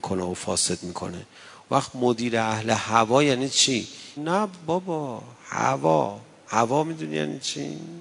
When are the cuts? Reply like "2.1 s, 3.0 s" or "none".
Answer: 4.2 s